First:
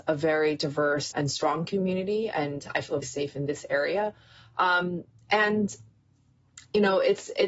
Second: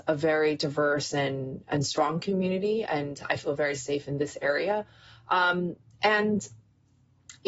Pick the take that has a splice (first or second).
first